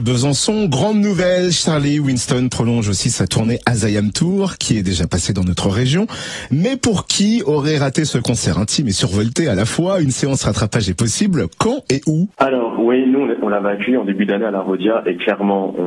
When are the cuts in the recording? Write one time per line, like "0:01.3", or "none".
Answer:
0:12.3